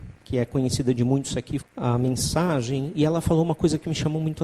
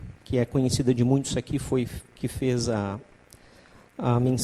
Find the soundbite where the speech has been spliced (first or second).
first